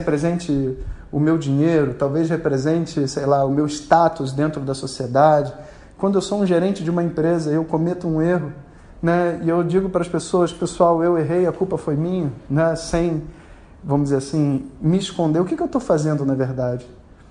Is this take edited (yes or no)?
no